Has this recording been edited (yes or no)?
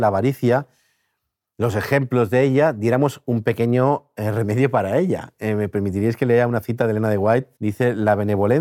yes